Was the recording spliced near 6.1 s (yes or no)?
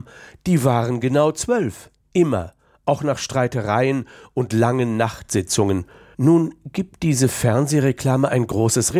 yes